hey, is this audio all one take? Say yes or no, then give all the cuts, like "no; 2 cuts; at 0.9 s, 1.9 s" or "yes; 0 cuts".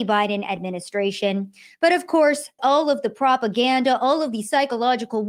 no; 1 cut; at 2.6 s